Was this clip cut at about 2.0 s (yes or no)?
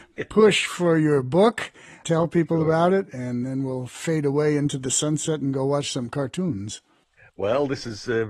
yes